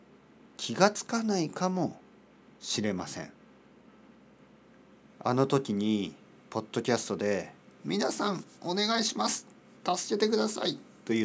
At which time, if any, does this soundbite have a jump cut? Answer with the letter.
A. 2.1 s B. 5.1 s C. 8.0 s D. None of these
B